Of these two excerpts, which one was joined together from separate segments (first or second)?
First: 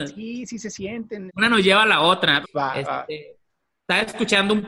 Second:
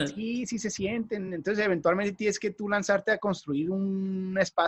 first